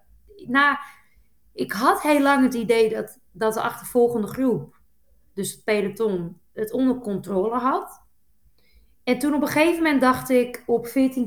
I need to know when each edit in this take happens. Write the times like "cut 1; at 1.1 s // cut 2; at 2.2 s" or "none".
none